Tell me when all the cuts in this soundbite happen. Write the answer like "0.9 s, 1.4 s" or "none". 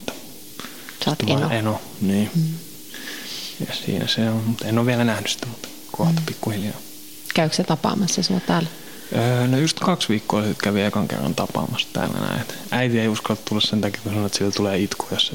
none